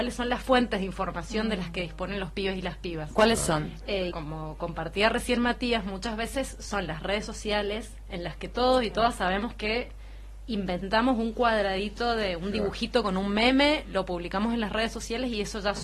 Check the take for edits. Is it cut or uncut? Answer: cut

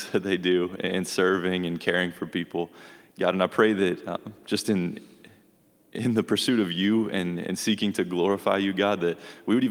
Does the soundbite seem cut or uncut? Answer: uncut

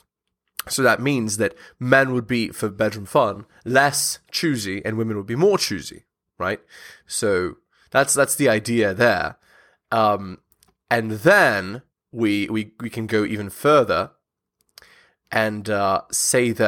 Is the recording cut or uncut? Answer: uncut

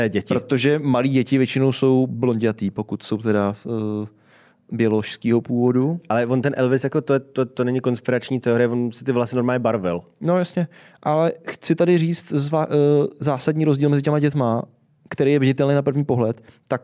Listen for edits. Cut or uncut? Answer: uncut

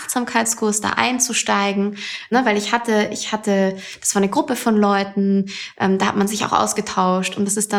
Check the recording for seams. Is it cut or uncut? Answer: uncut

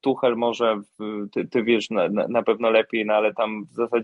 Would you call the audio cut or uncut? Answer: cut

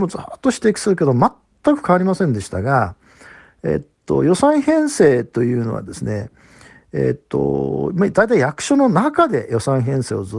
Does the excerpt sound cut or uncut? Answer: uncut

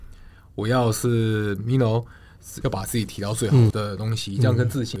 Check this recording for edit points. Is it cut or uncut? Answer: cut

